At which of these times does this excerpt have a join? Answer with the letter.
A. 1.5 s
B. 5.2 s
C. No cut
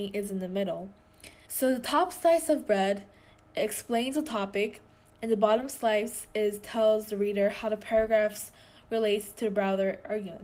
A